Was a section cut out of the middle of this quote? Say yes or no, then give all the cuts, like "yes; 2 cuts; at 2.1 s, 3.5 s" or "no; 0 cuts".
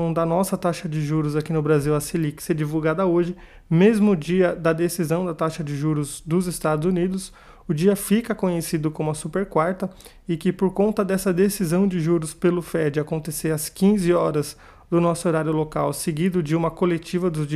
no; 0 cuts